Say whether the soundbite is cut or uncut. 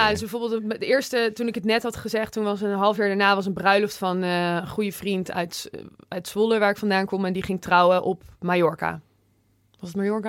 uncut